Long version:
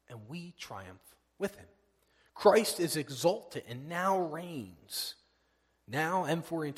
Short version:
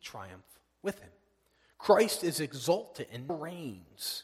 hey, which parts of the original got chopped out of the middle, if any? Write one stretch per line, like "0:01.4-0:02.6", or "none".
0:03.9-0:04.2

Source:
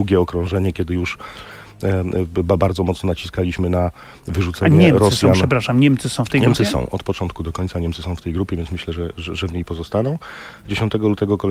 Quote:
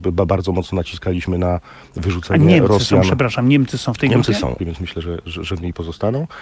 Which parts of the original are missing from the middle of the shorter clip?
0:06.9-0:08.5

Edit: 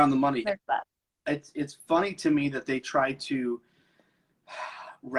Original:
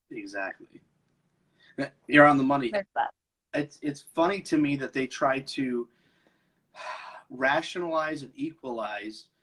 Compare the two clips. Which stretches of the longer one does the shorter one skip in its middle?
none

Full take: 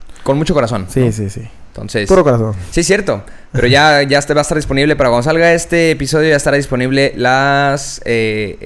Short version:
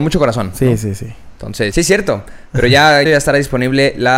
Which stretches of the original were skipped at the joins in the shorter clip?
0:02.1-0:02.7
0:04.1-0:06.2

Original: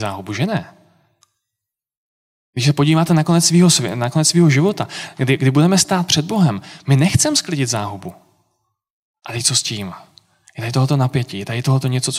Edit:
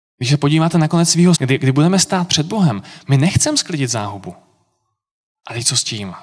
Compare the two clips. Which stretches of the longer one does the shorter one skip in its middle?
0:03.7-0:05.1

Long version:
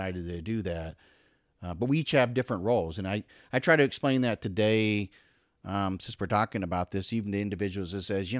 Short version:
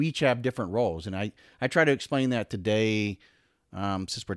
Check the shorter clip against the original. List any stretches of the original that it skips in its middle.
none

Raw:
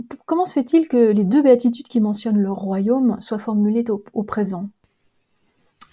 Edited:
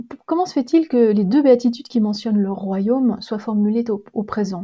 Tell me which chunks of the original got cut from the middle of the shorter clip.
none

